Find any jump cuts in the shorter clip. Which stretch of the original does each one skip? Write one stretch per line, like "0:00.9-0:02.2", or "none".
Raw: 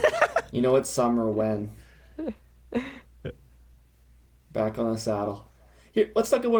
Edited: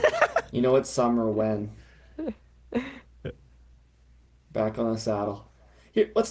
none